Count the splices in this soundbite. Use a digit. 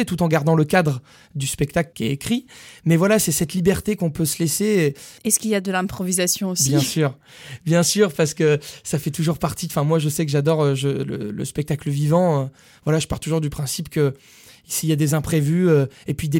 1